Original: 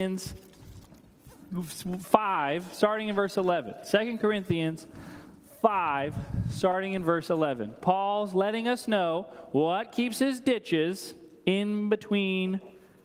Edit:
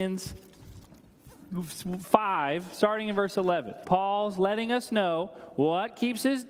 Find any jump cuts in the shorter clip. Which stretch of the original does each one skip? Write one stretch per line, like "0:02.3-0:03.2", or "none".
0:03.8-0:07.8

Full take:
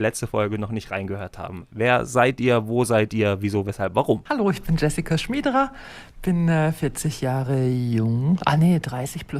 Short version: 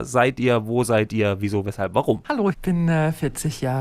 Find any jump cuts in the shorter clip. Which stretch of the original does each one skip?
0:04.5-0:06.1

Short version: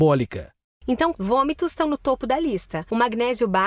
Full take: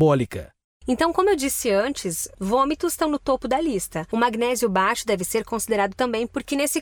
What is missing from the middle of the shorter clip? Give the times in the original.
0:01.1-0:02.3

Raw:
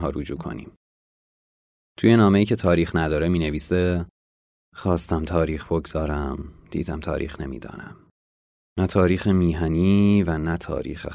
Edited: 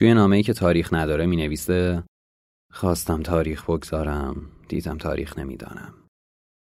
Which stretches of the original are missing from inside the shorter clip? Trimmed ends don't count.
none

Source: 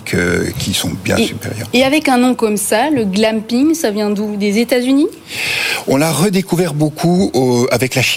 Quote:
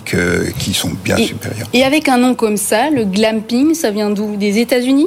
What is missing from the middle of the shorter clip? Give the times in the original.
none

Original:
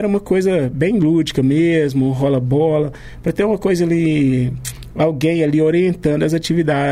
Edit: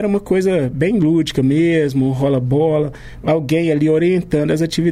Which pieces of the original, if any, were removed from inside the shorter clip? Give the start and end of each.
0:03.2-0:04.9

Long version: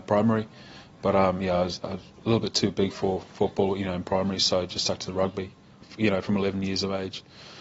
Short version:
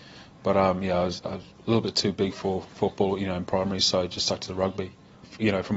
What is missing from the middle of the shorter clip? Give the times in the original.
none

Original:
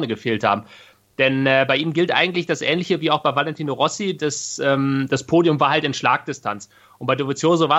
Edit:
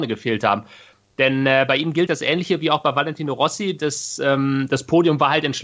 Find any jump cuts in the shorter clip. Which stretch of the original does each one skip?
0:02.1-0:02.5

